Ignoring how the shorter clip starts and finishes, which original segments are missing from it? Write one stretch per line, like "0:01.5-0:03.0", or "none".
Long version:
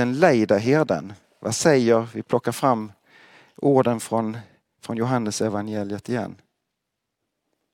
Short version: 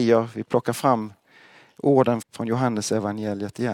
0:04.0-0:04.7